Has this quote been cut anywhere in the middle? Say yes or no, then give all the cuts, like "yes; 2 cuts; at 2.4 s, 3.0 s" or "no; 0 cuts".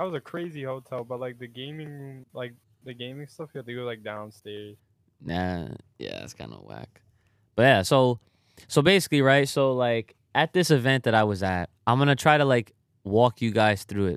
yes; 2 cuts; at 7.8 s, 11.8 s